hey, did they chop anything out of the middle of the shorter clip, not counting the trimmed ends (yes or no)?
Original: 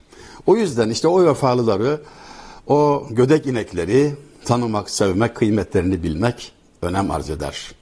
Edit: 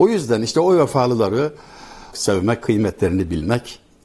yes